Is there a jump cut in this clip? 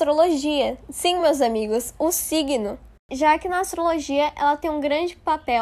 no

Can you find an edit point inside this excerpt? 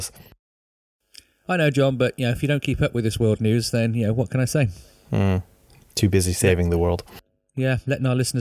no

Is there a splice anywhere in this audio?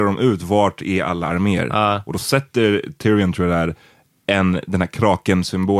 no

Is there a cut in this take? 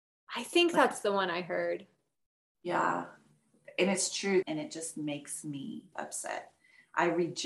yes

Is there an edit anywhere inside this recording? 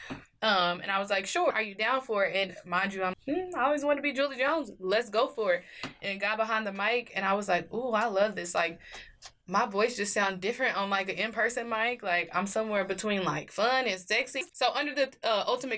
yes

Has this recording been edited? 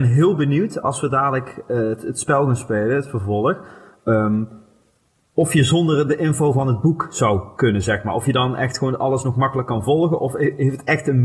no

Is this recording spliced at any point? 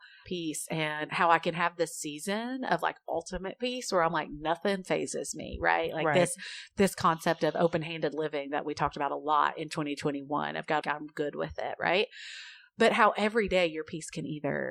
yes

